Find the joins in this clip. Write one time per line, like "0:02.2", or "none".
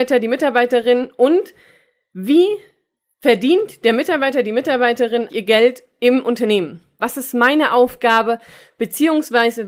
0:05.3
0:07.0